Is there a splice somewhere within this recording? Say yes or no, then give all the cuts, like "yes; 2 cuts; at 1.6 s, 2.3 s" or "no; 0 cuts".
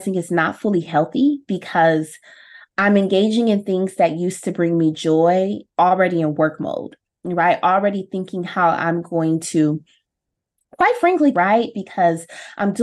yes; 1 cut; at 11.3 s